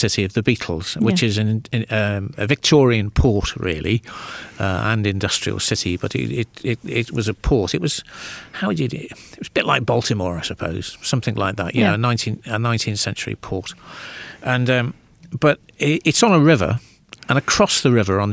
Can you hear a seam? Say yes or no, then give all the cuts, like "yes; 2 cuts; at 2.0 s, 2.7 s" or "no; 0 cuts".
no; 0 cuts